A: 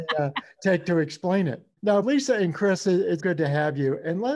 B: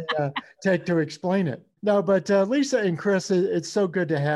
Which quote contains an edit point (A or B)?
A